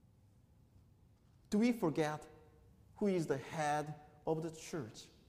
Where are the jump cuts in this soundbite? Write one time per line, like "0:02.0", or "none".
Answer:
none